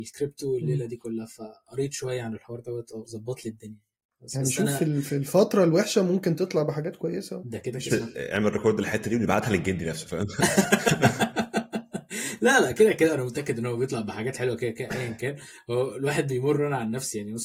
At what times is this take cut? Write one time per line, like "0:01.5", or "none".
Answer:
0:07.9